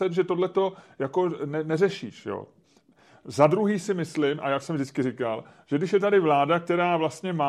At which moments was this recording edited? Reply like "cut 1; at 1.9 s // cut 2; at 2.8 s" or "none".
none